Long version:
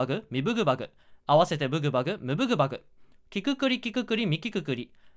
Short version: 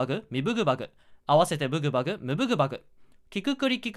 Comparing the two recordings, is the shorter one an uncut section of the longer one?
yes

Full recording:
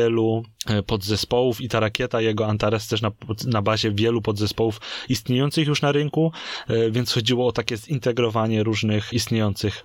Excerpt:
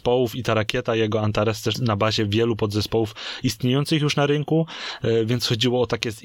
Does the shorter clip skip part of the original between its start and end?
yes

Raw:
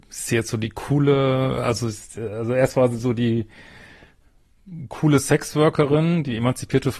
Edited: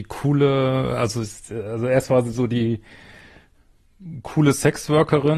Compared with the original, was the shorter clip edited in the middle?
no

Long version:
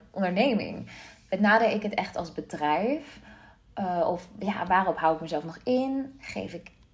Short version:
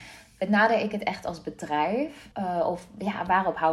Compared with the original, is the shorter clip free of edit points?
no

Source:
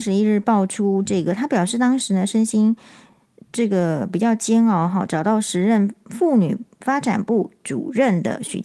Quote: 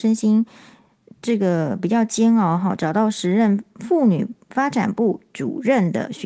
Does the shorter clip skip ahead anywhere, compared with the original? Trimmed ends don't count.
no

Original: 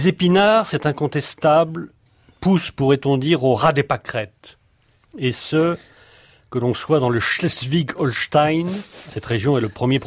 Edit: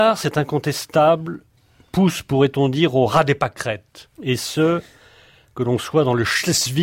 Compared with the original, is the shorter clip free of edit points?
no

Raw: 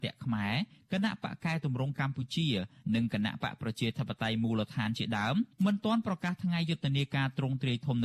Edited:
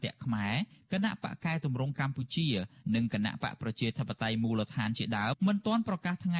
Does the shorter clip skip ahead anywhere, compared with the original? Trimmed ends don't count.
yes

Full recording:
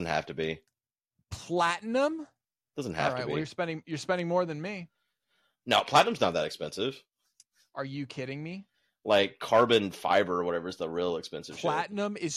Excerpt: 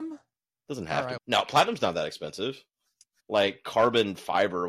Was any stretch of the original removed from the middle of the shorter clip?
yes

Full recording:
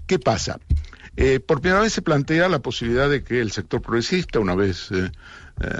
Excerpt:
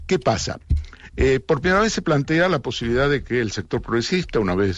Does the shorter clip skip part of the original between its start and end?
no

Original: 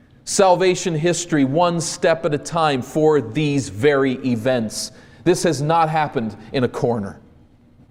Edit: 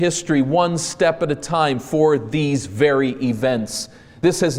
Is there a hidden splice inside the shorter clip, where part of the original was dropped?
no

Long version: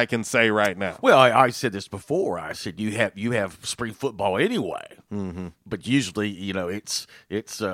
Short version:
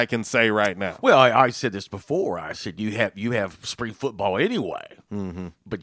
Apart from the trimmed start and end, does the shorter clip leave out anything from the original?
no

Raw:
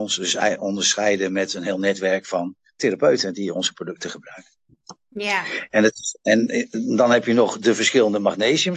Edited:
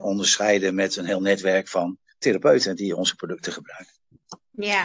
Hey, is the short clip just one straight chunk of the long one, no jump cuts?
yes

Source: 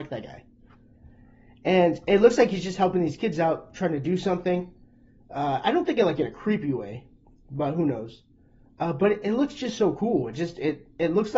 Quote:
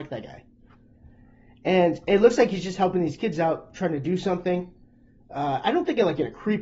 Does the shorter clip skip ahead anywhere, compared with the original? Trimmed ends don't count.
no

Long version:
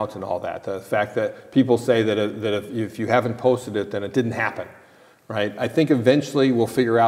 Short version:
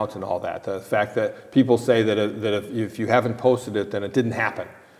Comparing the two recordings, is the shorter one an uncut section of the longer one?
yes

